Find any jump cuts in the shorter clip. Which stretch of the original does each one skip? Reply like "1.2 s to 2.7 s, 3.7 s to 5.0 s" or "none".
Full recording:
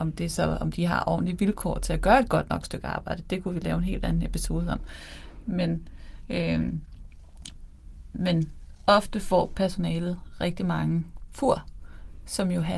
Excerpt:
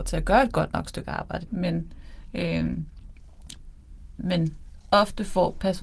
3.2 s to 5.4 s